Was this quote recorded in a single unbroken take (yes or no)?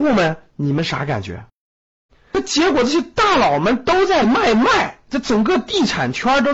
no